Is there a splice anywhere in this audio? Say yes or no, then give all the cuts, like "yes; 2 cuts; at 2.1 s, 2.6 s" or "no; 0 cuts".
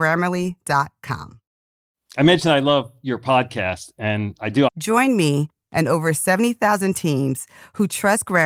yes; 1 cut; at 4.7 s